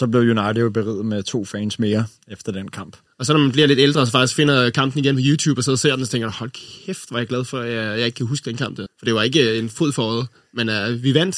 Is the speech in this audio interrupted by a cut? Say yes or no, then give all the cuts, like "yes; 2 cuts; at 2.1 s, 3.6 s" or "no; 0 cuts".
yes; 2 cuts; at 3.1 s, 8.9 s